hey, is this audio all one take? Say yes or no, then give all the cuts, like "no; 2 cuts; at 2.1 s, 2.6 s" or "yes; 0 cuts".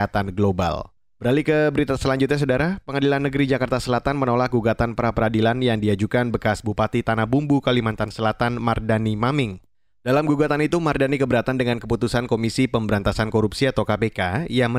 yes; 0 cuts